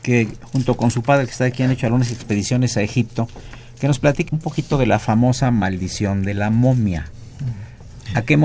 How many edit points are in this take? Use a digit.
1